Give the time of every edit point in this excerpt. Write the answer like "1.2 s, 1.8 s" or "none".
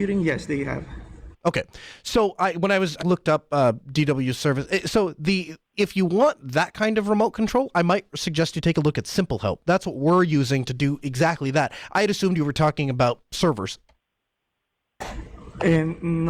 3.0 s